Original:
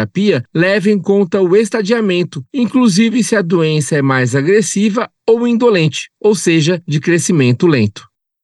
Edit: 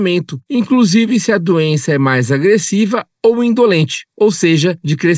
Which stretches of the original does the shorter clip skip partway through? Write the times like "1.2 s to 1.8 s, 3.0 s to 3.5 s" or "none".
none